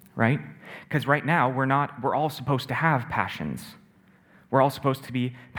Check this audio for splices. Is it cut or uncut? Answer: uncut